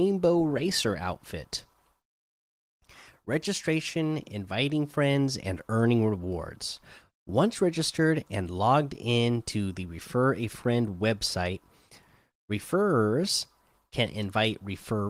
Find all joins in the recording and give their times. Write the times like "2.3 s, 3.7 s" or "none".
none